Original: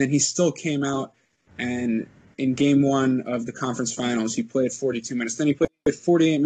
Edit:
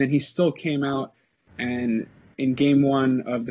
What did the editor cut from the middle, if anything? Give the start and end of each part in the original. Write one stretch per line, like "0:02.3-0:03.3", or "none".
none